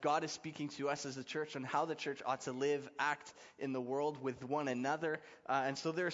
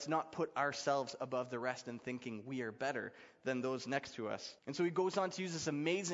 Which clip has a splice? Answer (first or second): second